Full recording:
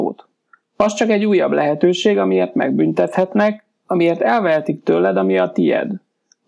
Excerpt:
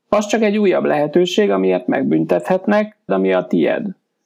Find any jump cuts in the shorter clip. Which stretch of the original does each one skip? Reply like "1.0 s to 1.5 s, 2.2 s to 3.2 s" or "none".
3.8 s to 5.1 s